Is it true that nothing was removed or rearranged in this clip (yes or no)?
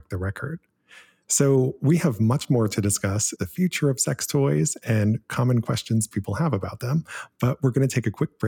no